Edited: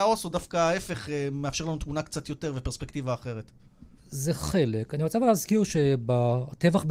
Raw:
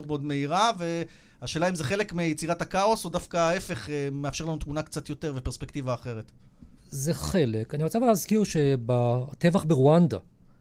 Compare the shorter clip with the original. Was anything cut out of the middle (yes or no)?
no